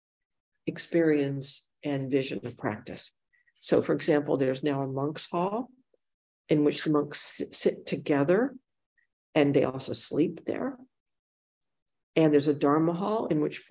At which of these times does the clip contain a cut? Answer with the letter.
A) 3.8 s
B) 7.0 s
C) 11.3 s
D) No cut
D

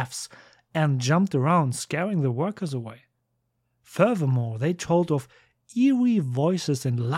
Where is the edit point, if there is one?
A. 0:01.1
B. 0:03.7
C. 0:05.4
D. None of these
D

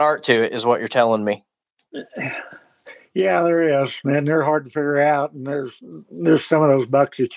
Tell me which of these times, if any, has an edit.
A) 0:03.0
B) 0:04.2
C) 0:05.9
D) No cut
D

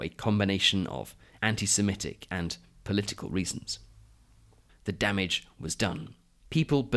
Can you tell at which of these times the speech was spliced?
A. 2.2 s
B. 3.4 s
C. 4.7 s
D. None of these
C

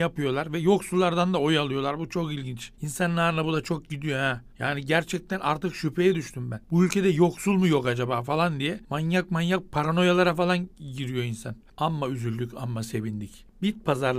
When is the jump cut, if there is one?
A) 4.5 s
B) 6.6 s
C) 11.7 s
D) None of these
C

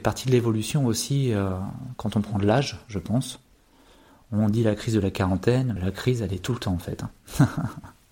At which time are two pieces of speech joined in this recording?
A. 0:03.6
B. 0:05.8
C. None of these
B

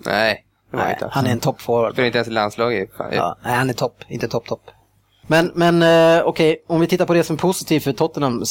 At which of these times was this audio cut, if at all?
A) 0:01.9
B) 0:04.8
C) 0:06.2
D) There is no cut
D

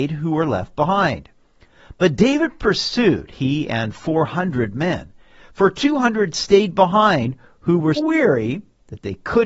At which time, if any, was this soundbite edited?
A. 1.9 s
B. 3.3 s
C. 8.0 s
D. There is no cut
C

